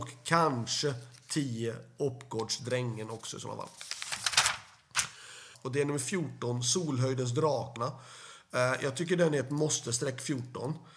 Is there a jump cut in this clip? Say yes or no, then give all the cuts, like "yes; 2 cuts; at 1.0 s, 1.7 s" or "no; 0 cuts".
yes; 2 cuts; at 5.5 s, 7.8 s